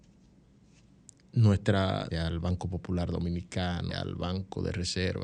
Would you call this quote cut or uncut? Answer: cut